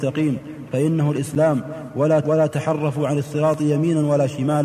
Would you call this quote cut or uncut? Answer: cut